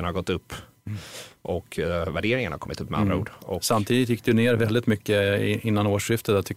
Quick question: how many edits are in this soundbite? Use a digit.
0